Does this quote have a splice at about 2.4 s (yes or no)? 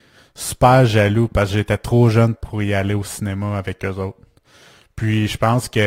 yes